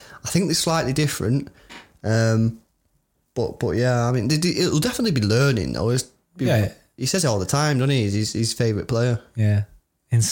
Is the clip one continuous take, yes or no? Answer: yes